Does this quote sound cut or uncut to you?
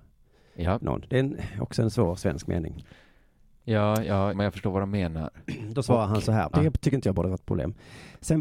cut